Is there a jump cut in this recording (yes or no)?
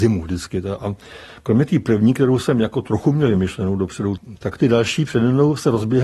yes